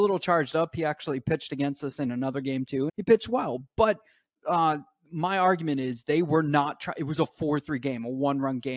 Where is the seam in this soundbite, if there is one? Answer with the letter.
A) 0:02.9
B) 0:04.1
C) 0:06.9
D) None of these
A